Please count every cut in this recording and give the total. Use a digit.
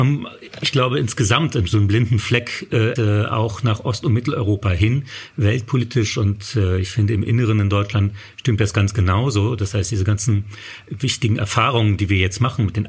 1